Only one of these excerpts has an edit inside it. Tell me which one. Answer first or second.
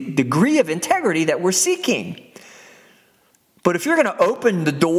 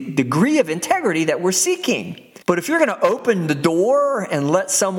second